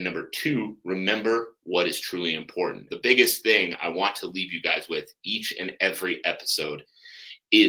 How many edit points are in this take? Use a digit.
1